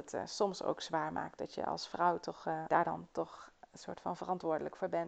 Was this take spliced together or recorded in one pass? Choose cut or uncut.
cut